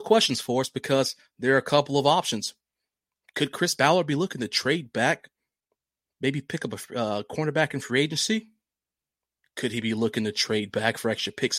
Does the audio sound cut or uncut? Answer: uncut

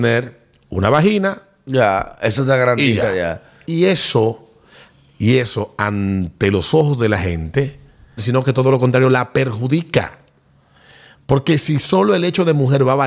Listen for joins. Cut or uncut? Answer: cut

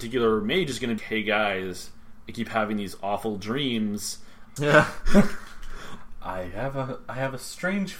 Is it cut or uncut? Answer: cut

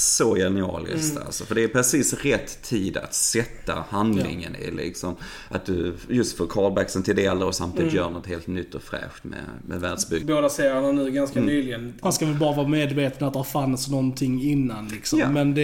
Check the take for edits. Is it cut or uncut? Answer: cut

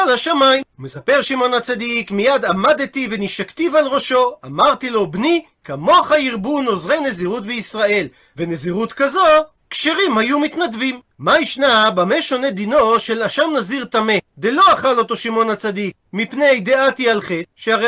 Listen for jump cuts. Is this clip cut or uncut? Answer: cut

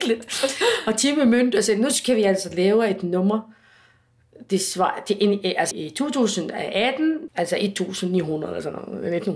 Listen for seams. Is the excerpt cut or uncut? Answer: cut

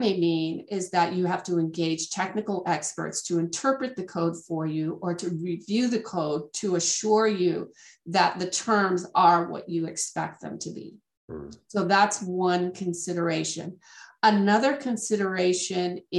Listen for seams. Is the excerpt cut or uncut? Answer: uncut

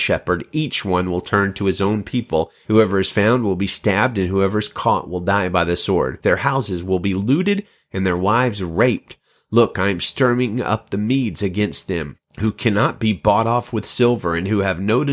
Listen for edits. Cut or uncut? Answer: cut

